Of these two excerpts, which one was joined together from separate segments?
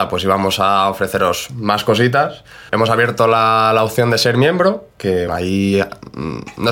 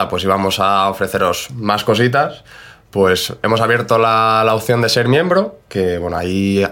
first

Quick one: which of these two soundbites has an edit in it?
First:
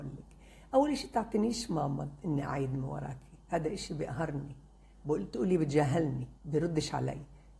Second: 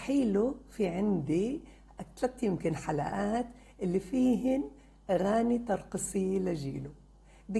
first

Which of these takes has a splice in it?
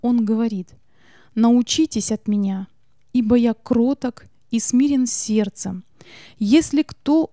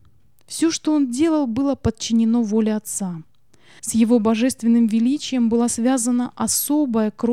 second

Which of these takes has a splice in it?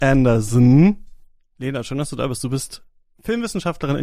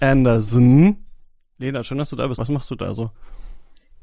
second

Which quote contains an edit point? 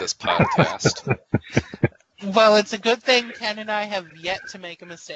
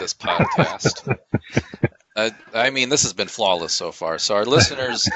second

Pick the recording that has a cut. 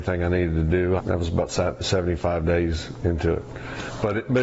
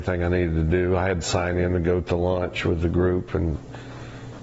first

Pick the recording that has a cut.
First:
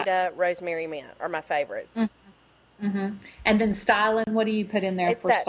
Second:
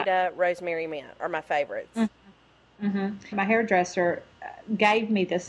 second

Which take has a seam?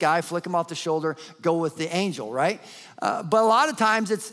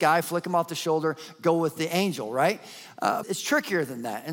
second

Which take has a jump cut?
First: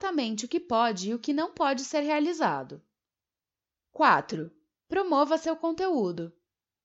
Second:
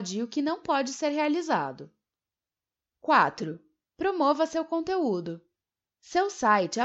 second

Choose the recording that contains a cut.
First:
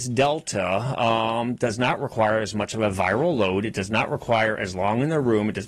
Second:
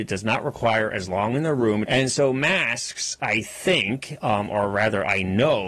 second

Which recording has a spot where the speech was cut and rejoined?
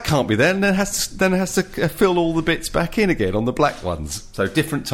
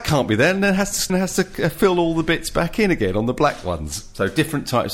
second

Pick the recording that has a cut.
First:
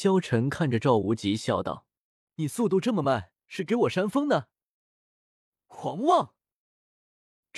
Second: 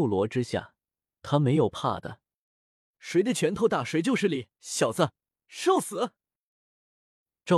second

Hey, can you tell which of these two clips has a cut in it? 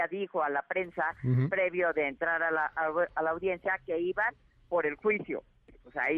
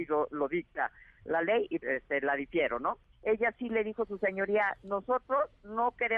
second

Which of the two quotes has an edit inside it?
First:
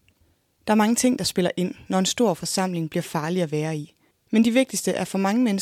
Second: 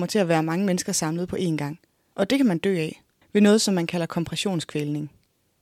second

